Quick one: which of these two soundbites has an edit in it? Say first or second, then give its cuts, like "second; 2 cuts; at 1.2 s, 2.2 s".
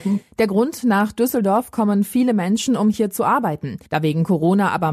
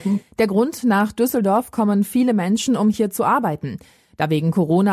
first; 1 cut; at 3.9 s